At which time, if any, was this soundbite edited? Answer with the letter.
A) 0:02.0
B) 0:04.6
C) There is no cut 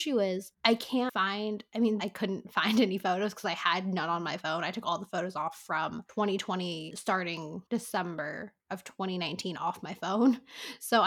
A